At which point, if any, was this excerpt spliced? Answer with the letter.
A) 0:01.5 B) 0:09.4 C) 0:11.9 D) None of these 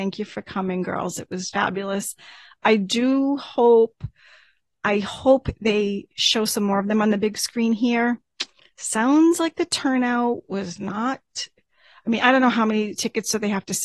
A